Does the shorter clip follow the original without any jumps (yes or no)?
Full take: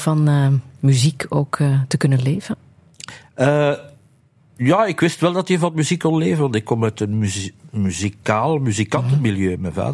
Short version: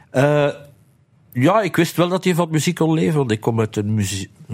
yes